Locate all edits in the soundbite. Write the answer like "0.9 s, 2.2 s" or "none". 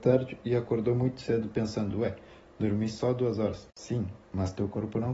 none